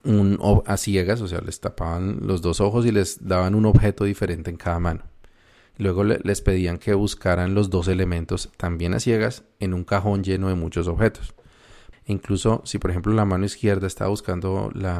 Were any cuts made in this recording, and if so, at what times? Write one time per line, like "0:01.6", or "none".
0:11.9